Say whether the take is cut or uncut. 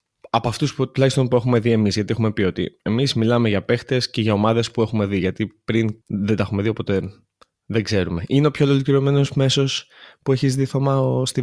cut